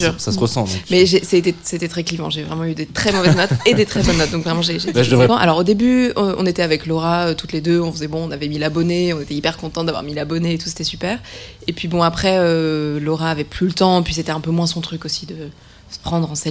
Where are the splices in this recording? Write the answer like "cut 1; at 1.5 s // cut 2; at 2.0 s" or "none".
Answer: cut 1; at 5.3 s